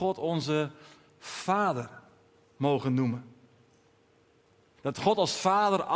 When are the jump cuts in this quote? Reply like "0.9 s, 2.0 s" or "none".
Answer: 4.8 s